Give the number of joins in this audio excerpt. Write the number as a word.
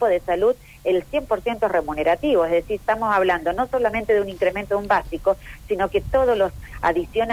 zero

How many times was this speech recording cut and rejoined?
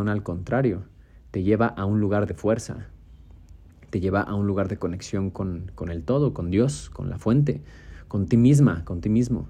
zero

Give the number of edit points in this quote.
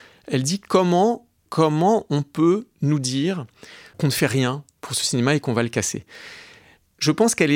one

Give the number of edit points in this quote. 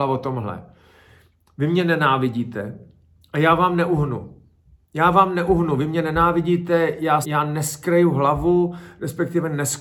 one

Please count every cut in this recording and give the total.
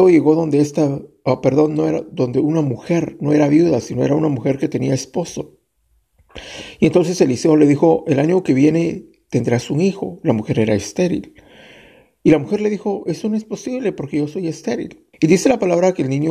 one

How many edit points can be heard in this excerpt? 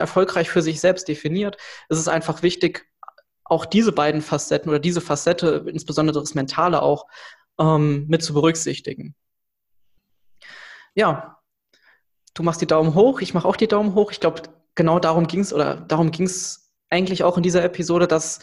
zero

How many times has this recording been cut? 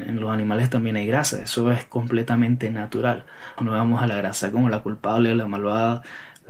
one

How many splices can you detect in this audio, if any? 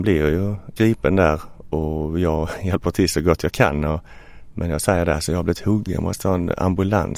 one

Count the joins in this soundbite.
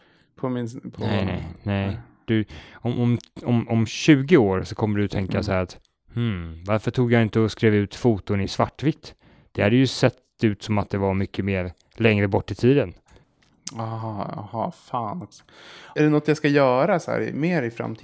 zero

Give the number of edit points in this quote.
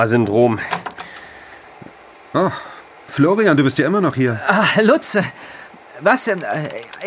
zero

